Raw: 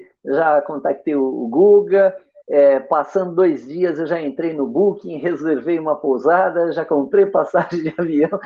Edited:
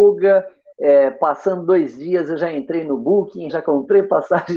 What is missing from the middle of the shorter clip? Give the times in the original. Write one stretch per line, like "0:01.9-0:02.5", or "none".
0:05.2-0:06.7

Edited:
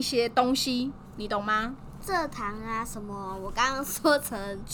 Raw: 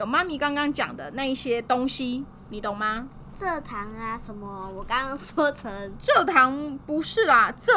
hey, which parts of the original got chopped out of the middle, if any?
none

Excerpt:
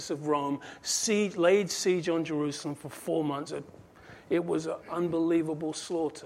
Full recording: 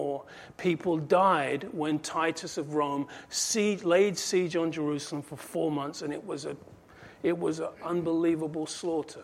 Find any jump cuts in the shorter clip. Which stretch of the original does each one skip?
0:05.9-0:06.4

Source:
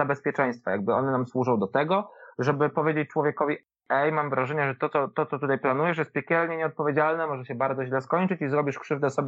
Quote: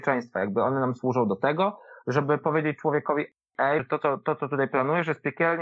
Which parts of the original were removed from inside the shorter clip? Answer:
0:04.1-0:04.7

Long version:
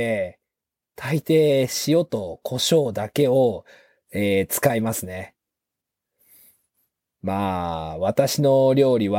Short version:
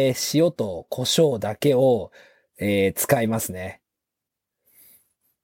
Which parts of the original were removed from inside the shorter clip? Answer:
none

